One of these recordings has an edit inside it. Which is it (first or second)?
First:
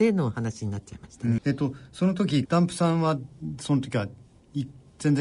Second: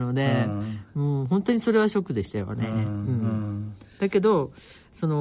first